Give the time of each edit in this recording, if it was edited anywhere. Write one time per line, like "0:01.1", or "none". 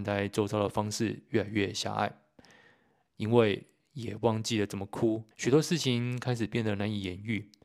0:05.3